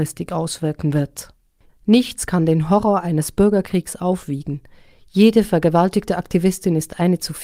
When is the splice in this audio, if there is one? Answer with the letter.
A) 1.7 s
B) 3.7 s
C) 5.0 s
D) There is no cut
A